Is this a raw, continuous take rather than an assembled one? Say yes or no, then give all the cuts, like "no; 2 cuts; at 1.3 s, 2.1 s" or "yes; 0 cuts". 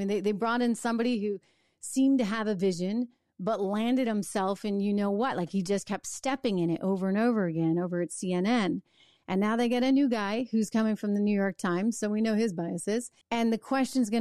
no; 1 cut; at 13.2 s